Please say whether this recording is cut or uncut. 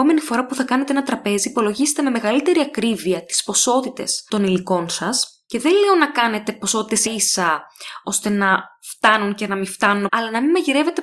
cut